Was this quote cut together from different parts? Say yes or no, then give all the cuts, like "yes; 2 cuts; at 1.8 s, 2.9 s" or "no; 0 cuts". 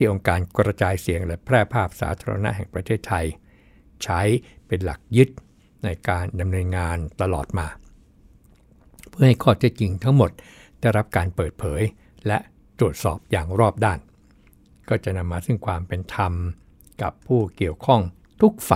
no; 0 cuts